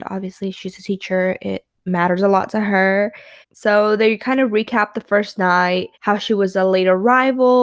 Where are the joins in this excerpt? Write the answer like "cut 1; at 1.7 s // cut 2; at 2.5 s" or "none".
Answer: cut 1; at 3.4 s // cut 2; at 5.9 s